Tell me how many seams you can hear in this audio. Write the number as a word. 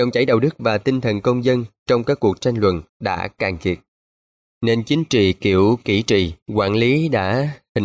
two